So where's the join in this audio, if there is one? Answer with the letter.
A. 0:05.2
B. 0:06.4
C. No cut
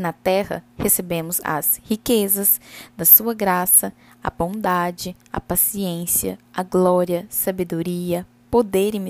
C